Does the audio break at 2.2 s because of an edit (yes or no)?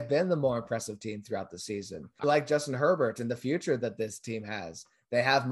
yes